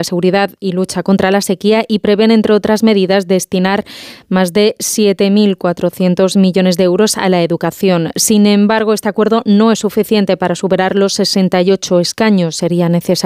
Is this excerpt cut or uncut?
uncut